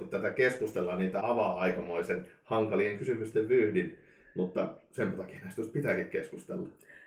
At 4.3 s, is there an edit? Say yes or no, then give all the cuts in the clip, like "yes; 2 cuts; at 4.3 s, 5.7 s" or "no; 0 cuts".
no; 1 cut; at 1.2 s